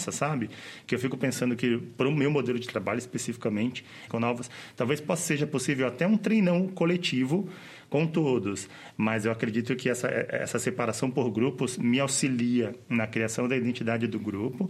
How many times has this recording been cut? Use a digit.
1